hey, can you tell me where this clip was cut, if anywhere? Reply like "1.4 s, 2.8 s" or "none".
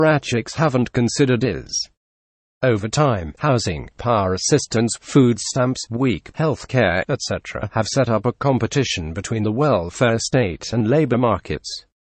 3.4 s, 5.9 s

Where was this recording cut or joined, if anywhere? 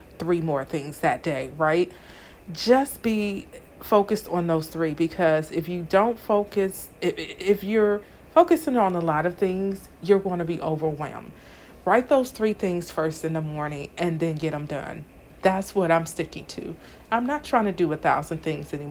none

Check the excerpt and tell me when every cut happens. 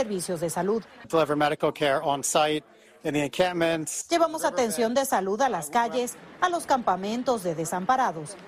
none

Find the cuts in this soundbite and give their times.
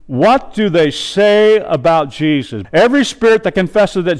2.6 s

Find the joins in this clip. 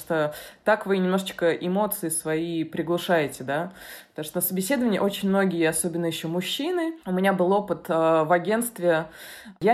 7.0 s

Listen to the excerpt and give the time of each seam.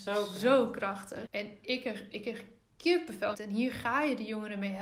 1.3 s, 3.3 s

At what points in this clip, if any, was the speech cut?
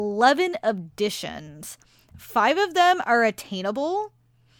none

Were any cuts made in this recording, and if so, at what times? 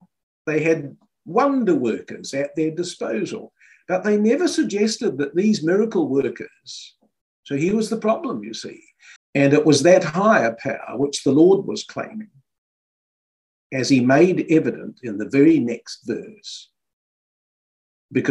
7.3 s, 9.2 s

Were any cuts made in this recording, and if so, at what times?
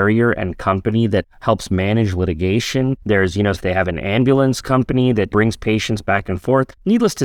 3.5 s

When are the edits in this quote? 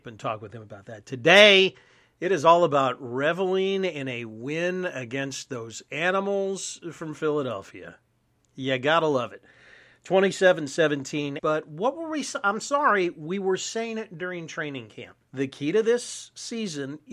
11.4 s, 15.2 s

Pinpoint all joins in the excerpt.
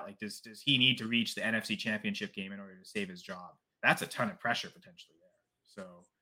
none

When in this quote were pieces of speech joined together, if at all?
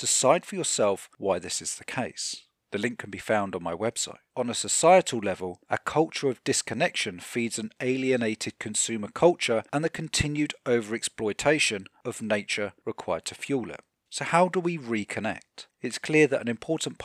none

